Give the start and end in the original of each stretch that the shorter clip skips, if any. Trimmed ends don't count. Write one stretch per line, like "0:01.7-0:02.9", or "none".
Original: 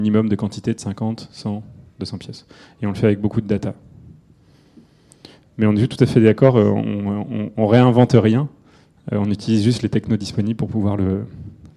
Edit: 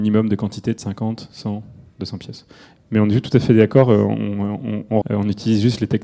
0:02.8-0:05.4
0:07.7-0:09.0